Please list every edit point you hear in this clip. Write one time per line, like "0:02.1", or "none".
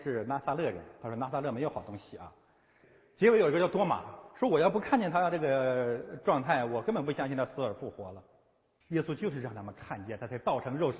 0:02.8
0:08.8